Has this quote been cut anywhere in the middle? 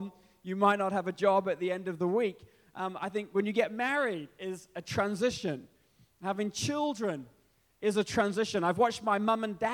no; 0 cuts

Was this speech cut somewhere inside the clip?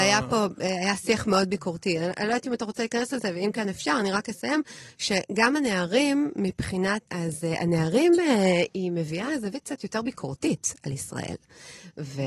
yes; 1 cut; at 7.1 s

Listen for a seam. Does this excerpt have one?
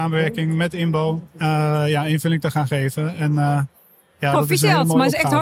no; 0 cuts

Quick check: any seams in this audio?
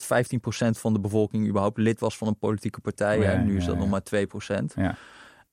no; 0 cuts

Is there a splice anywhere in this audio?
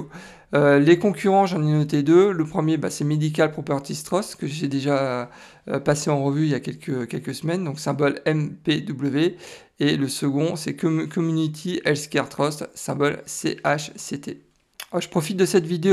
no; 0 cuts

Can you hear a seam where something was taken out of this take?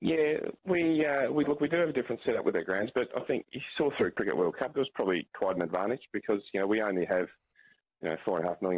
no; 0 cuts

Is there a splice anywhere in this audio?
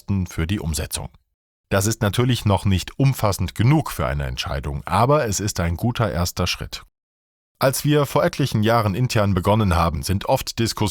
yes; 1 cut; at 9.9 s

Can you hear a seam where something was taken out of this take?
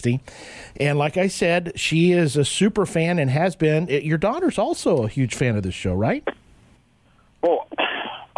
yes; 1 cut; at 6.2 s

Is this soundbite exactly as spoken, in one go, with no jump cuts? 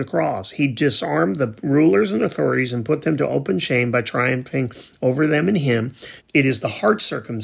no; 1 cut; at 6.2 s

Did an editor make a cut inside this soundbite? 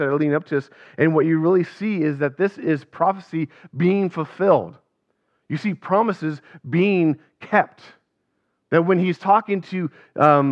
no; 0 cuts

